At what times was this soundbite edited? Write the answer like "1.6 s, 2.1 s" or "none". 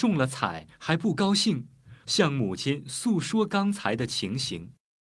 2.0 s